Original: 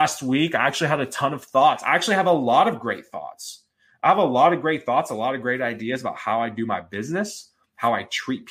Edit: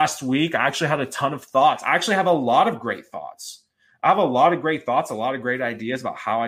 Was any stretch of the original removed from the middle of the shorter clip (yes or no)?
no